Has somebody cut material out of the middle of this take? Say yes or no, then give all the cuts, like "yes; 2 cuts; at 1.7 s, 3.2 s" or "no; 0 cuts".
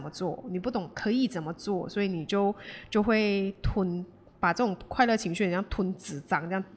no; 0 cuts